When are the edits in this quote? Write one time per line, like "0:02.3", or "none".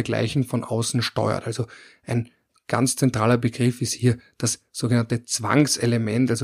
none